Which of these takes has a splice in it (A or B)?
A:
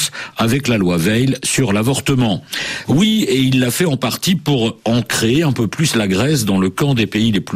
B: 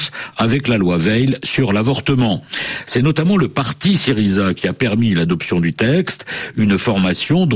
A